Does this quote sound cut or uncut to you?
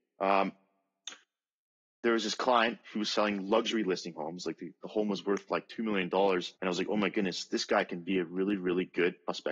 cut